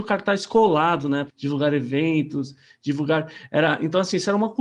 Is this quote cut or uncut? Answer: cut